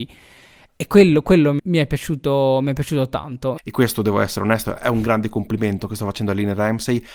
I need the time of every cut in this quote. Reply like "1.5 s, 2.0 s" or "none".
1.6 s, 3.6 s